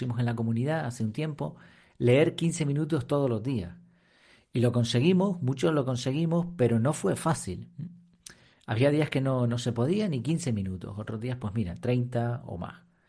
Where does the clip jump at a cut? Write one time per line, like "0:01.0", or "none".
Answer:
none